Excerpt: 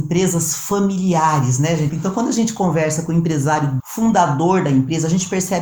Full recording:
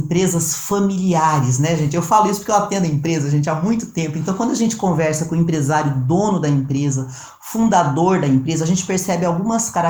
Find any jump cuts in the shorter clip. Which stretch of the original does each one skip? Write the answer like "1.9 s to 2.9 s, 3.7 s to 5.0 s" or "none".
1.9 s to 4.1 s, 6.0 s to 7.4 s